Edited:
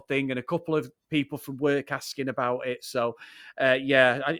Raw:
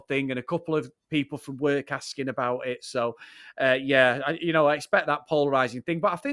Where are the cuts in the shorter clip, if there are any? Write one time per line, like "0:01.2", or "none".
none